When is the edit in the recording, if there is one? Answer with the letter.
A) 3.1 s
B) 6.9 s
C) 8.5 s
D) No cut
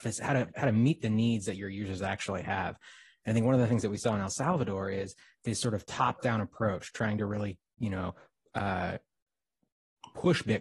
D